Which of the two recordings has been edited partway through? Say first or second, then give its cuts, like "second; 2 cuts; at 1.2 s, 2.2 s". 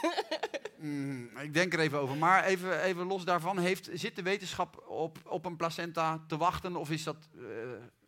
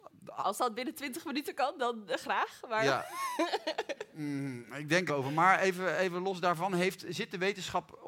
second; 1 cut; at 5.1 s